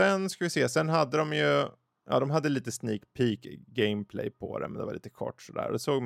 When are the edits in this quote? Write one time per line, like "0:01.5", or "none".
none